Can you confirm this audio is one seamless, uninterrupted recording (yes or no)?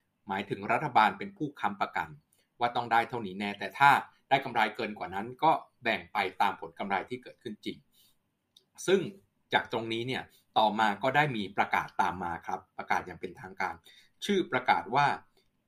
yes